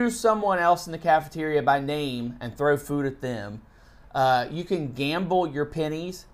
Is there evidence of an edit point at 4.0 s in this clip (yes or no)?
no